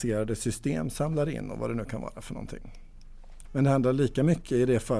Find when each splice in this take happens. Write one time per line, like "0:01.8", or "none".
0:03.4

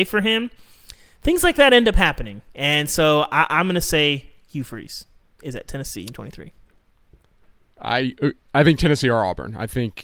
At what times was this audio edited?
0:06.1

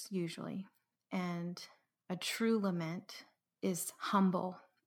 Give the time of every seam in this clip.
0:03.4

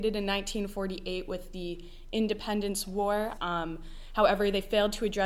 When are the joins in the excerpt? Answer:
0:03.4

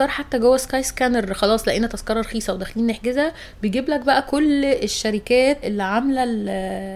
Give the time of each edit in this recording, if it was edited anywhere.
0:05.6

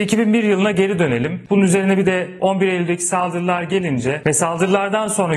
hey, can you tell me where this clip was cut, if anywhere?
0:01.5

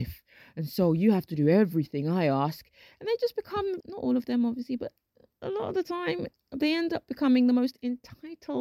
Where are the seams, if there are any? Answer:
0:03.8

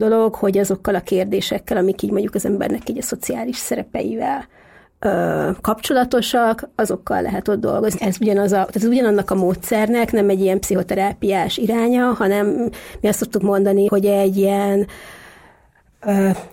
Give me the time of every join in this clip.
0:08.0
0:13.9

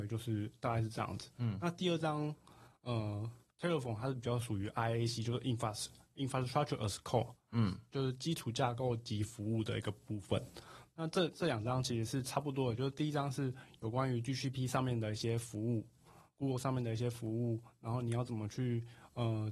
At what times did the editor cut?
0:10.9

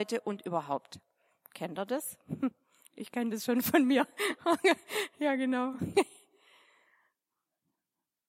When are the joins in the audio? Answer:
none

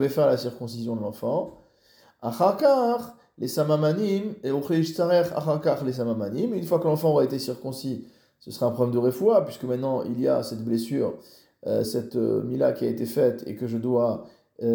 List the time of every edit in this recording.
0:11.8

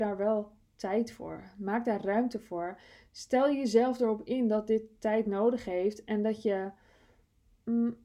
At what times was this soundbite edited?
none

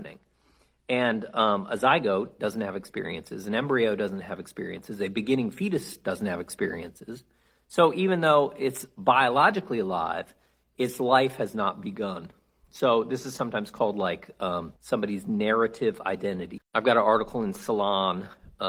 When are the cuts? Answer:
0:14.8
0:16.6

